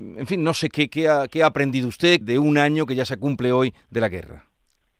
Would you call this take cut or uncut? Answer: cut